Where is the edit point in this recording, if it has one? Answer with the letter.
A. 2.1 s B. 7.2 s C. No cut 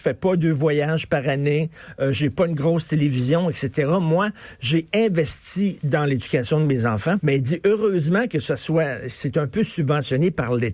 B